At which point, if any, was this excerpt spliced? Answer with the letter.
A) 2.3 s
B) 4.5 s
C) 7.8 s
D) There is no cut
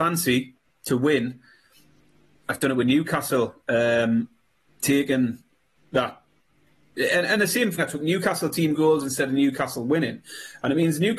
C